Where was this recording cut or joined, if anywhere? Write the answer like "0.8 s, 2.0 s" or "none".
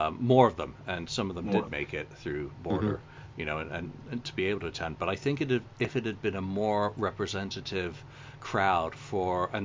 none